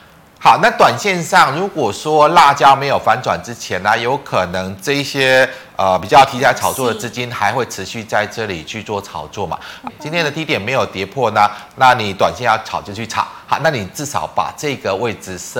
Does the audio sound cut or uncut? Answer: cut